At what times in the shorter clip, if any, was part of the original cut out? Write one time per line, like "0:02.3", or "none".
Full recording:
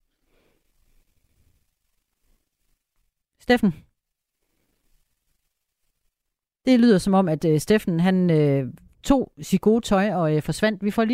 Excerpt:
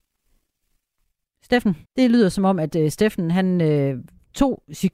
0:01.8